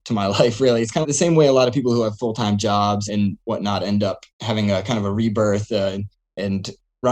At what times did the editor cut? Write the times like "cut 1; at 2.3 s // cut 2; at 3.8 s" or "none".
cut 1; at 1.0 s // cut 2; at 3.1 s // cut 3; at 4.3 s

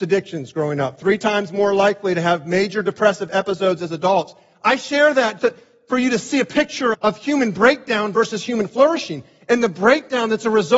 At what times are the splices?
cut 1; at 5.4 s // cut 2; at 6.9 s

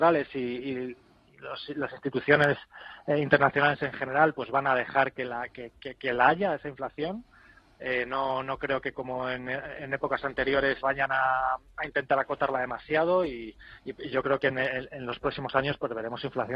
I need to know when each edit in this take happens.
cut 1; at 10.8 s

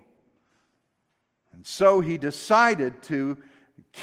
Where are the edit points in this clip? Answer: cut 1; at 1.4 s

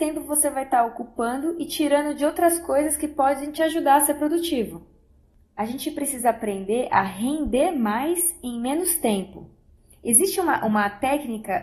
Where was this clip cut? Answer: none

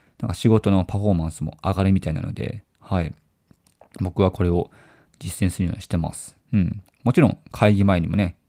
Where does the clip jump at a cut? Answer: cut 1; at 6.4 s

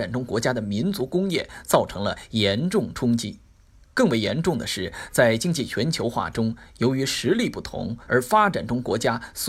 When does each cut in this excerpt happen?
cut 1; at 8.1 s

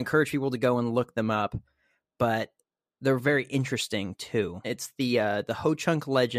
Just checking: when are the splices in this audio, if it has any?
cut 1; at 4.6 s

